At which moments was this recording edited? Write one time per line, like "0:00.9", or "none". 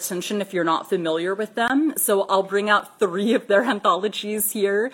none